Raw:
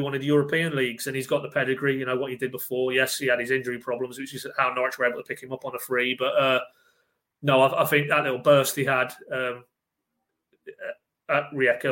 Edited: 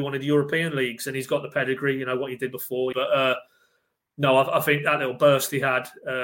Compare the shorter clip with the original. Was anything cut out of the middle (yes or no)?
yes